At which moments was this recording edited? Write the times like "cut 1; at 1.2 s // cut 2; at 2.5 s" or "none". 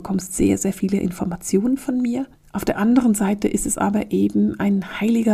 none